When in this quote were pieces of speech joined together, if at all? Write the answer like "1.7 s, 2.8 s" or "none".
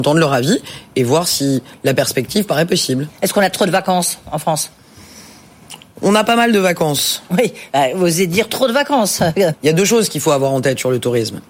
9.5 s